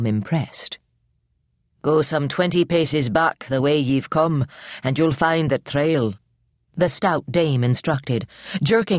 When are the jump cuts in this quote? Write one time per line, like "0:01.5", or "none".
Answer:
none